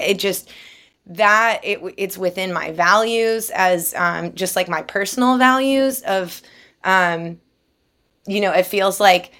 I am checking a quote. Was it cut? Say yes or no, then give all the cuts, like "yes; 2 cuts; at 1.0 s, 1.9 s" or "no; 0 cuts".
no; 0 cuts